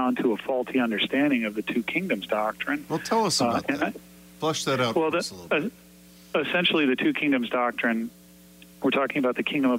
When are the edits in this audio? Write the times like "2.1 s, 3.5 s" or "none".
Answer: none